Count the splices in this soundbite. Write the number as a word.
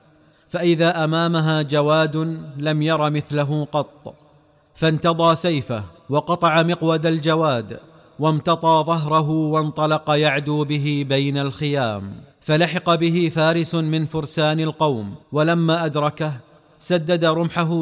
three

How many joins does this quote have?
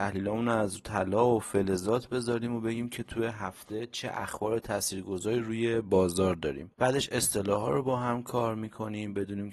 one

